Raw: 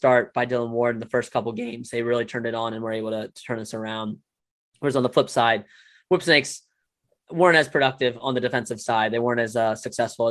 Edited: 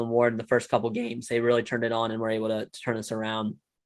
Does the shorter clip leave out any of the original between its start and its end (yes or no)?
no